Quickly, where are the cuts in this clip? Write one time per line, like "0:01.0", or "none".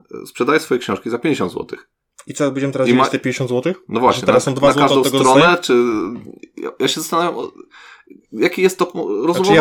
none